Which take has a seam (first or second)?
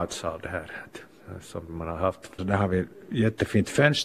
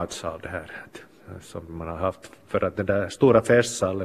first